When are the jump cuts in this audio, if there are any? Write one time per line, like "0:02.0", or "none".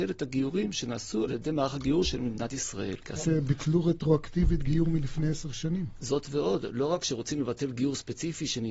0:03.2